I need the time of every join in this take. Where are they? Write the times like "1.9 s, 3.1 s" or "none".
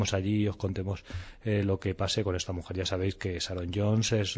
none